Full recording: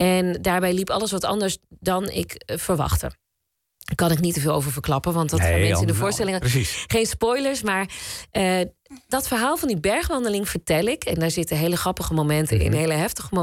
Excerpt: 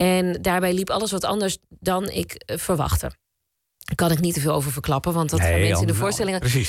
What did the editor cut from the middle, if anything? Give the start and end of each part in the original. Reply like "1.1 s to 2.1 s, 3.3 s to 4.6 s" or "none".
none